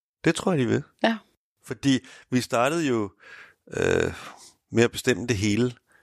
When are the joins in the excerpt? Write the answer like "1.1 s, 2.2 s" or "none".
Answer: none